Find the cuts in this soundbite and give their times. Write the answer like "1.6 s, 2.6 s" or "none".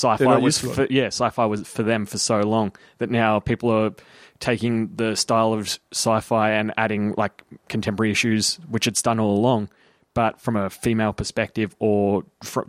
none

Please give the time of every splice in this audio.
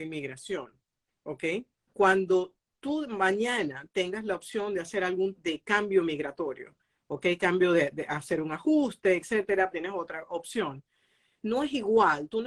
1.9 s, 5.3 s, 9.7 s

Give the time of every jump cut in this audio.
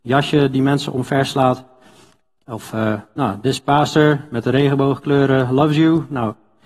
none

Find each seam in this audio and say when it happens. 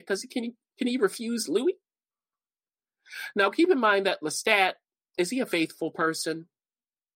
none

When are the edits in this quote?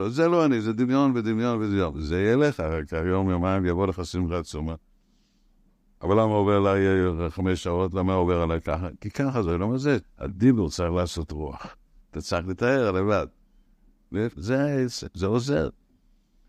10.0 s, 12.0 s, 14.4 s

